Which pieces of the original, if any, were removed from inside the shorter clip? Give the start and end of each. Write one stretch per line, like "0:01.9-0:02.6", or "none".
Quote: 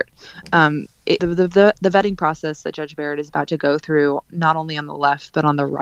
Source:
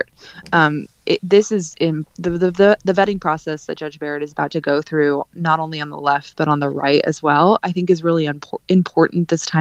0:01.2-0:02.2